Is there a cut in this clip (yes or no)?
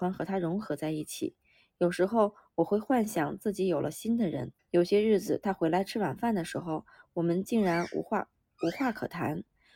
yes